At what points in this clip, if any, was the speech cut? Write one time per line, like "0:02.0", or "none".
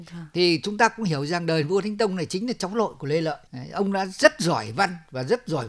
0:03.5